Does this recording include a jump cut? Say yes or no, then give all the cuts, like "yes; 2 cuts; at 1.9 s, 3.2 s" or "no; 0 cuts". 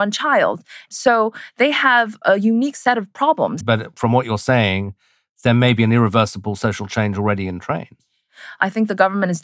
yes; 1 cut; at 3.6 s